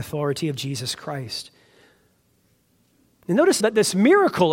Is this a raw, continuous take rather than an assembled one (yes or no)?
no